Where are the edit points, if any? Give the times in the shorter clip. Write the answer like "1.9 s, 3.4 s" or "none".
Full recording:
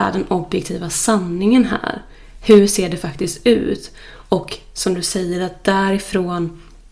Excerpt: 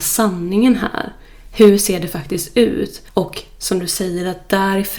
3.1 s